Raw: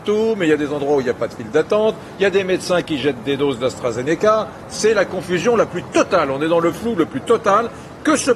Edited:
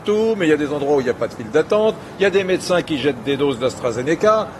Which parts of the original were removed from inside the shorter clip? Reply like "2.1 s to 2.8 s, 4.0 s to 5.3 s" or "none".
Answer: none